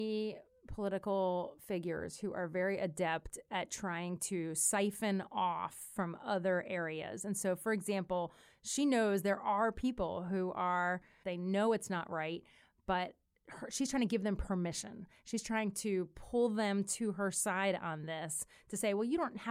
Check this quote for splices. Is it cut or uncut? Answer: cut